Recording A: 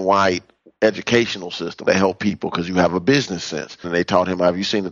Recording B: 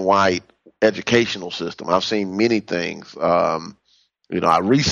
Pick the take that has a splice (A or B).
A